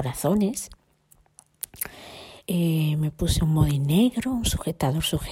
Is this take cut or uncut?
cut